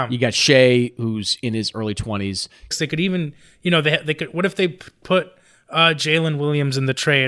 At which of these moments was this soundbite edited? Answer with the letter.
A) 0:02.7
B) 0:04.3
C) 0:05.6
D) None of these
A